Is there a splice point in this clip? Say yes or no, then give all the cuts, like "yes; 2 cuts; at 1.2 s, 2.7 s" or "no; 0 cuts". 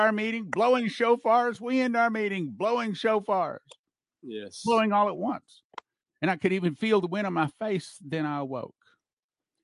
no; 0 cuts